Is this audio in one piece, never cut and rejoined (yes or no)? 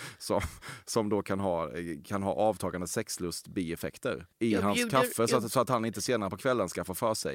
no